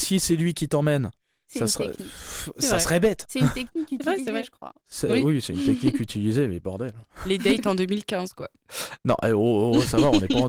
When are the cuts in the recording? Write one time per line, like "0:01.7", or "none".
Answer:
none